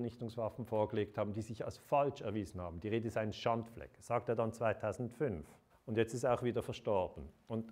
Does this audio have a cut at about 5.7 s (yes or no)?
yes